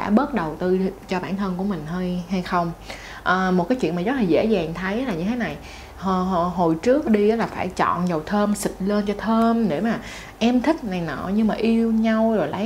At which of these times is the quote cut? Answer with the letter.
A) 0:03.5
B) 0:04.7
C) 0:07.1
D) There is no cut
C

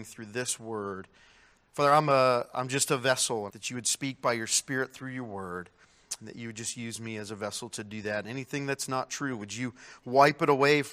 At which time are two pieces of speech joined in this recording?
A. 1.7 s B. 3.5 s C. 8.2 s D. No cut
B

